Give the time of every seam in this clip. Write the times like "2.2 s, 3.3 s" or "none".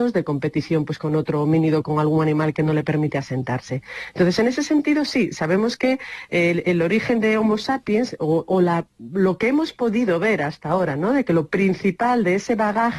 none